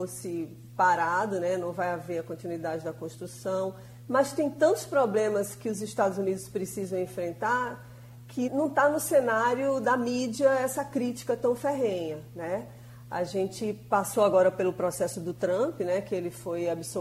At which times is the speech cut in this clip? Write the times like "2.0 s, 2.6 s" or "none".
4.1 s, 8.5 s